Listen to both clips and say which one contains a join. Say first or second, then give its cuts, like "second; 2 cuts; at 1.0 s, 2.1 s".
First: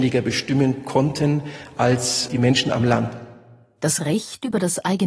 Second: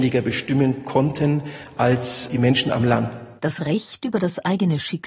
second; 1 cut; at 3.4 s